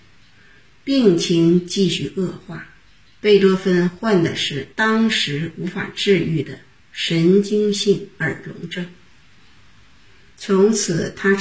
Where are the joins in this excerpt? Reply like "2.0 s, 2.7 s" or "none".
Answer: 3.1 s, 4.7 s, 10.3 s